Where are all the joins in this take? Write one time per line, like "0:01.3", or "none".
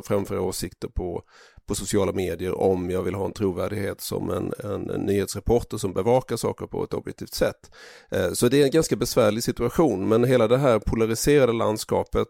none